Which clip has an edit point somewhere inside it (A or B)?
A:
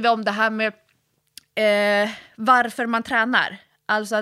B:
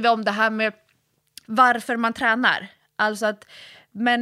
B